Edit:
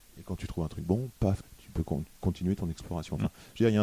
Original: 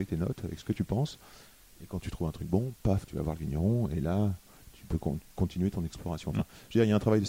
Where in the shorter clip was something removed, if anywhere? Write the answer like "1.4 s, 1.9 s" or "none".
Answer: 1.4 s

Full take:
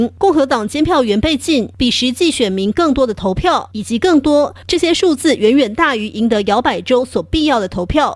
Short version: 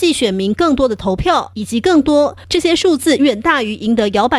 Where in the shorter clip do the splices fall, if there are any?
3.2 s

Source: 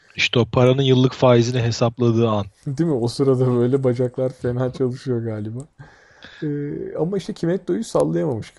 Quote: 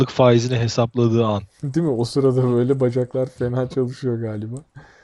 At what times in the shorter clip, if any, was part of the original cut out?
none

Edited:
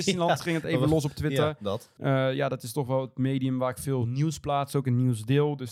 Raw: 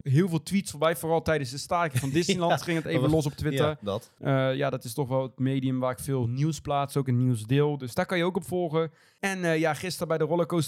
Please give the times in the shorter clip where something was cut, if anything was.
none

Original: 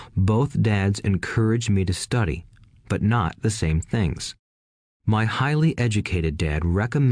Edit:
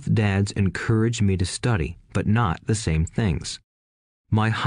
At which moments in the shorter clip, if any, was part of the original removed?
2.0 s

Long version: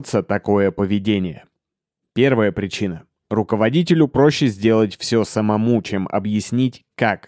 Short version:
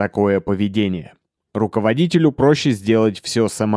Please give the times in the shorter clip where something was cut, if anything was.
1.4 s

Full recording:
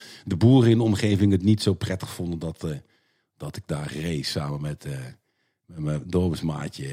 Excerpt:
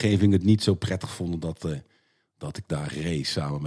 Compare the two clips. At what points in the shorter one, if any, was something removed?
none

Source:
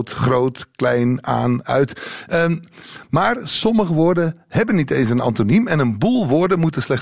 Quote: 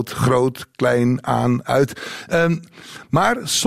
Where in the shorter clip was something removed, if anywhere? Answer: none

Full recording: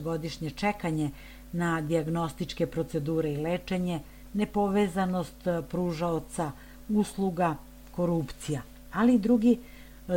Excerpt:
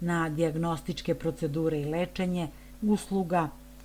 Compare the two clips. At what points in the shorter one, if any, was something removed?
2.8 s

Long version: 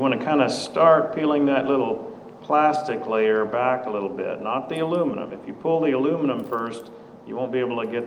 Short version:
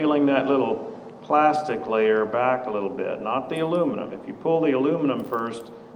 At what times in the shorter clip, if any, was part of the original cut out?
none

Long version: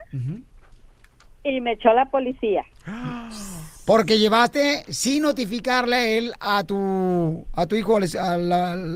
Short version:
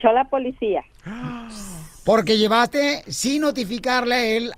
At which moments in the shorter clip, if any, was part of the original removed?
none

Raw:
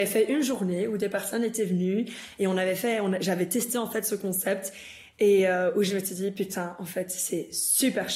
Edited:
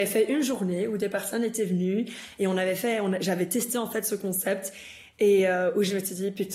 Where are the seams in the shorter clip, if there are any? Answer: none

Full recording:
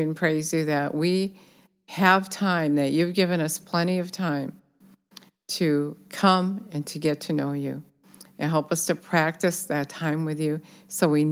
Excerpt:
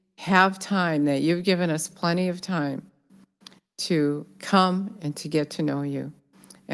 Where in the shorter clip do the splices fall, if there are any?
none

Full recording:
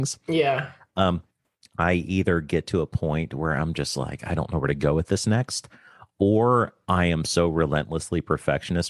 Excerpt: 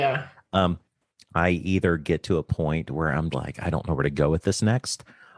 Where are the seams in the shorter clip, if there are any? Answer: 3.3 s

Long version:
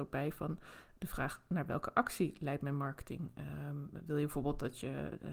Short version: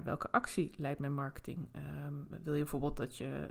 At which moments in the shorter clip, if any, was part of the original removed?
none

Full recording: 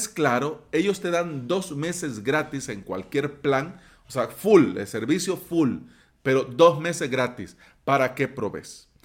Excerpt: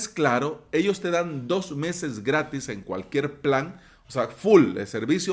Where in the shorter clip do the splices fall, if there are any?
none

